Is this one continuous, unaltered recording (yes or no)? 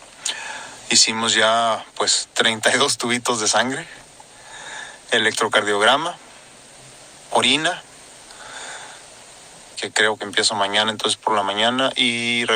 no